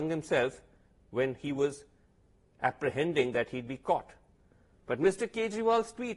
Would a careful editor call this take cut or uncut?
cut